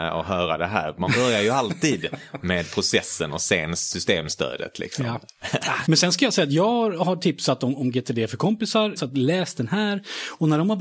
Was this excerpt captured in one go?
no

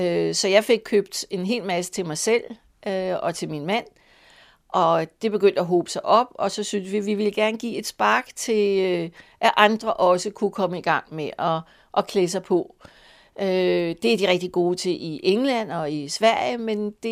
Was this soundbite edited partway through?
no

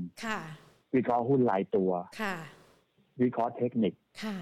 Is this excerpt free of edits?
yes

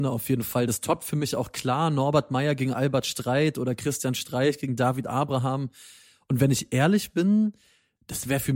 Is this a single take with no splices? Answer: yes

